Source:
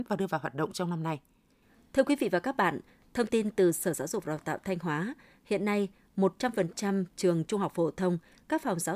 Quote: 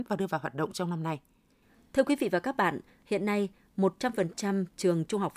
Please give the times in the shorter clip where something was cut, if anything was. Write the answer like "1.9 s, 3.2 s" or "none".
3.0 s

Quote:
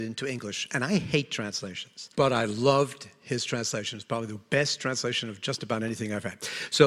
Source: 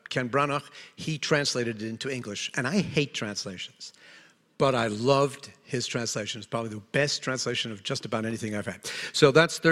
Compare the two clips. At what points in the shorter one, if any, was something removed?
2.1 s

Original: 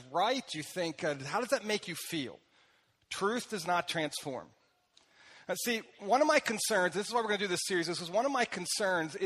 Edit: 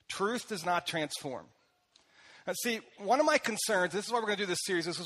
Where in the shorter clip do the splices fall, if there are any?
none

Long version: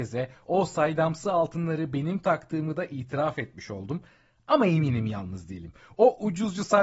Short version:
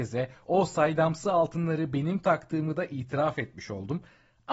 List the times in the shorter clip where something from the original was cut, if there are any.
none

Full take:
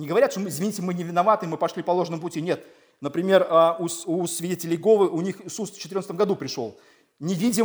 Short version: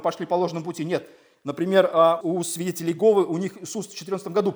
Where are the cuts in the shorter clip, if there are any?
2.2 s

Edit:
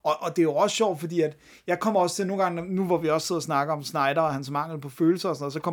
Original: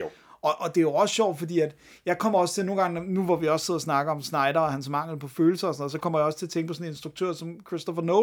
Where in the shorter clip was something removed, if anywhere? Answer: none

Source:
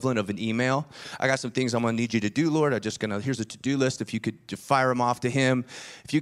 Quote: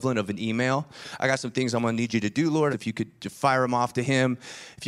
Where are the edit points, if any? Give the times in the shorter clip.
2.7 s

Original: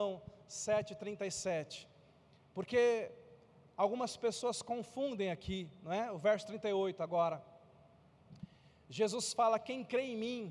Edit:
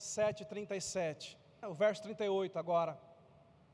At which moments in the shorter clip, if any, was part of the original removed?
1.6 s

